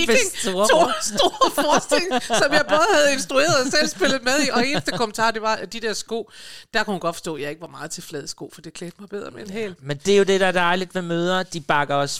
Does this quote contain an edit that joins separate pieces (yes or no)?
no